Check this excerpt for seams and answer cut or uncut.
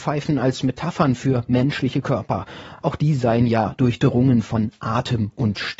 uncut